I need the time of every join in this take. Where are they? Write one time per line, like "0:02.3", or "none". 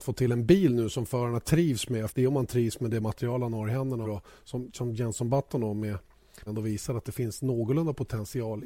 0:02.1
0:04.0
0:06.5